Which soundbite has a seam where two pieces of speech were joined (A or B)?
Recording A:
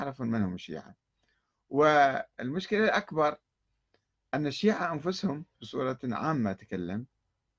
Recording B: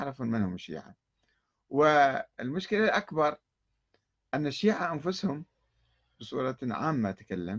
A